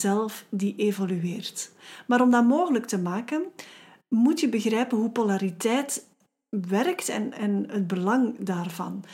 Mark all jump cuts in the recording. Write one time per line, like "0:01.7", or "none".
none